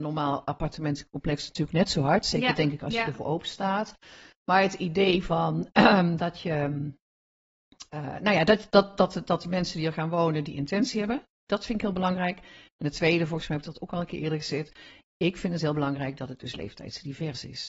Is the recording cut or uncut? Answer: uncut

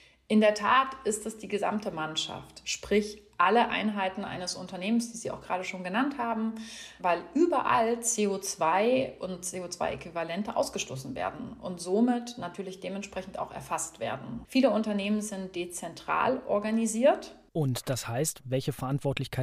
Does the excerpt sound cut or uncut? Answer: cut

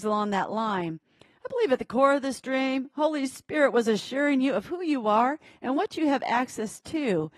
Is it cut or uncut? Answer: uncut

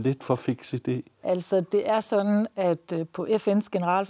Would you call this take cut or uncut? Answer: cut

